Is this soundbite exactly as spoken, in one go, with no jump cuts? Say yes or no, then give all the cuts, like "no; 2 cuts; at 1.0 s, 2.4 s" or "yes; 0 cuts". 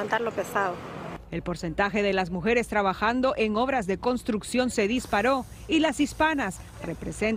yes; 0 cuts